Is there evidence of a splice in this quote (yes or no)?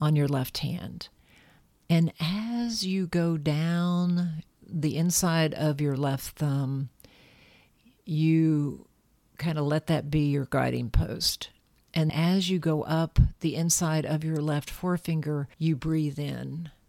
yes